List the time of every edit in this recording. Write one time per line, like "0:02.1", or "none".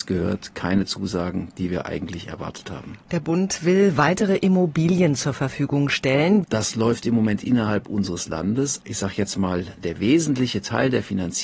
0:06.4
0:08.8